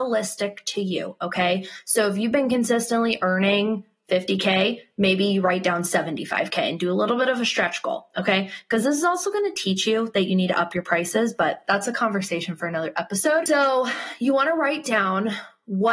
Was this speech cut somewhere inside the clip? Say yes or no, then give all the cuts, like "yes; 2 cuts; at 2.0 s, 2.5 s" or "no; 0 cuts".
no; 0 cuts